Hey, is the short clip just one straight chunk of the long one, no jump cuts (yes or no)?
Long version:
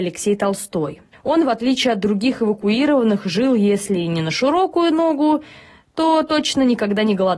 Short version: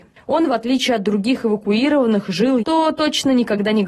no